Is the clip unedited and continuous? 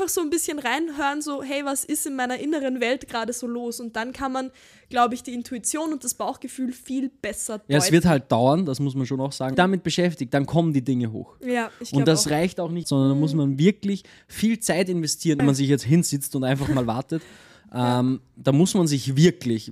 no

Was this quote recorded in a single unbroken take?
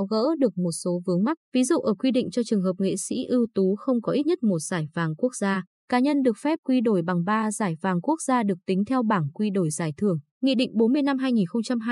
no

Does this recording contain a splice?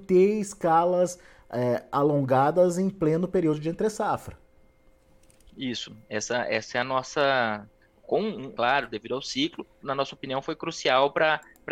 yes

